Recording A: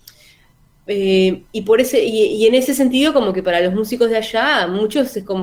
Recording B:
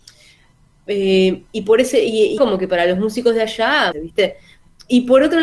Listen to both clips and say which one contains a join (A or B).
B